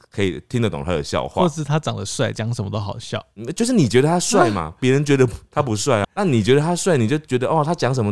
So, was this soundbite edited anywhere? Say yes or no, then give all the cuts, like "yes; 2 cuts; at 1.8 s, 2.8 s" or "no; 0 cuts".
yes; 1 cut; at 6.0 s